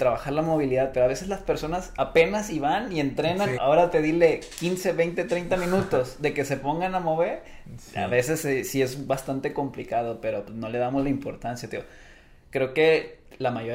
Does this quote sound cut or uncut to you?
cut